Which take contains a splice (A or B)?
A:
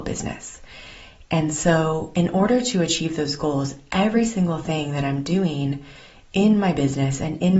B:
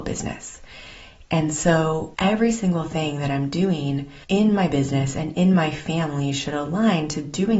B